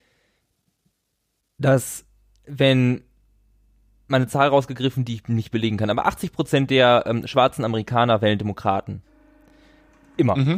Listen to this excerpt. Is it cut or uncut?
uncut